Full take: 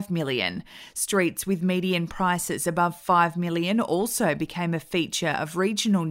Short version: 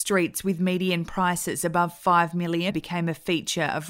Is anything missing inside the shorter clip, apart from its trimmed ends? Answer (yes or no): yes